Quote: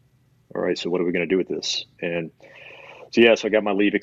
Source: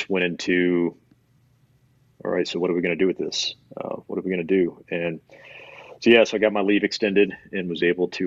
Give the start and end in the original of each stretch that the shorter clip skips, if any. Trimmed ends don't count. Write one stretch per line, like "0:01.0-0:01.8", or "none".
0:03.6-0:04.8